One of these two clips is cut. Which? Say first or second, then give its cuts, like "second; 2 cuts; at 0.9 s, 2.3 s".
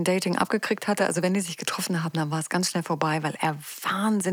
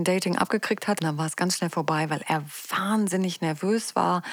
second; 1 cut; at 1.0 s